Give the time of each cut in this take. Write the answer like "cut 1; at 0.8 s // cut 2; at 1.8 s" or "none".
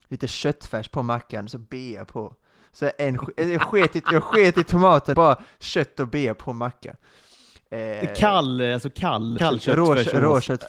cut 1; at 5.1 s // cut 2; at 9.4 s